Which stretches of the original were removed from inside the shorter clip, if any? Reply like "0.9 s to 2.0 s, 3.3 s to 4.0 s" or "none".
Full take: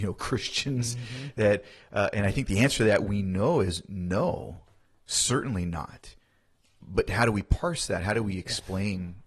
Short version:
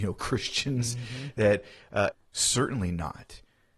2.1 s to 4.9 s